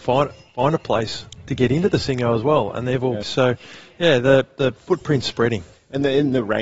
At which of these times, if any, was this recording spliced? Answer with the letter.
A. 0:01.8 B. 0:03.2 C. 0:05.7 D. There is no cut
B